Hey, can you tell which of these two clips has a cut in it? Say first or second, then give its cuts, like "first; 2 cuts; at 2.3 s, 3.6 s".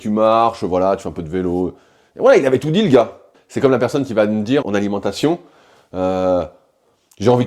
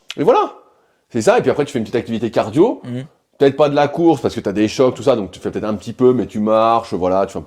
first; 2 cuts; at 3.3 s, 4.6 s